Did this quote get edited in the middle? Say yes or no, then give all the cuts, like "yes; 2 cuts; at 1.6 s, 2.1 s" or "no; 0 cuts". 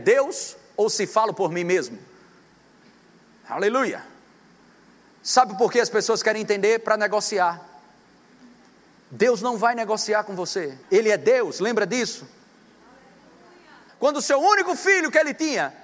yes; 2 cuts; at 10.8 s, 13.9 s